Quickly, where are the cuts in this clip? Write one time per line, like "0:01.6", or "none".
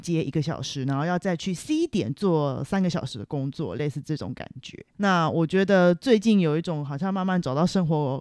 0:04.9